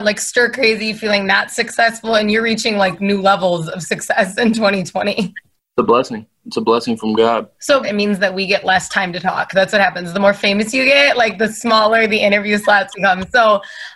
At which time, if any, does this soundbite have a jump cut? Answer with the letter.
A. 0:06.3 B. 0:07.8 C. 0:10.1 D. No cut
B